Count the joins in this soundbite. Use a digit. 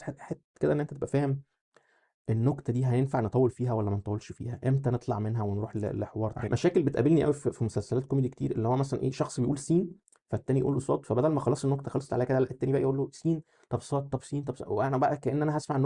1